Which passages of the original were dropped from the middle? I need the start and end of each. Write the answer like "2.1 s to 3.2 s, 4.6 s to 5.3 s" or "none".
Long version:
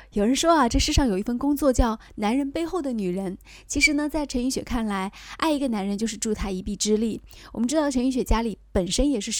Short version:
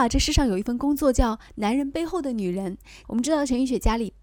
3.6 s to 7.5 s